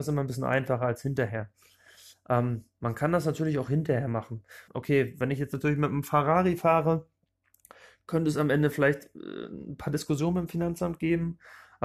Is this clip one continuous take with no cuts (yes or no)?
no